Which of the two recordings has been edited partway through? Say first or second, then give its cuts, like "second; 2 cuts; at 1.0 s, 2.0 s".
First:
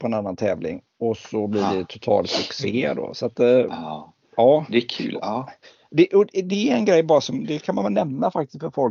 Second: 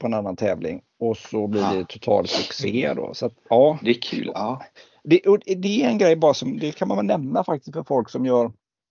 second; 1 cut; at 3.3 s